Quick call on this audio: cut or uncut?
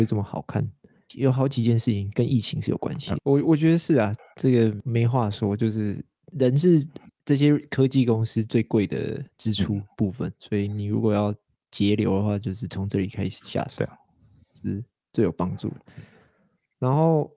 cut